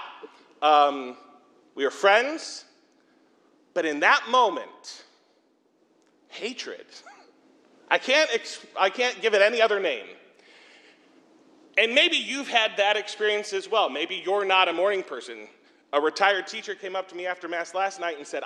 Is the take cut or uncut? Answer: uncut